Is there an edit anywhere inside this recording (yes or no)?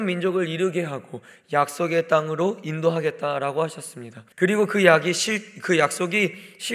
yes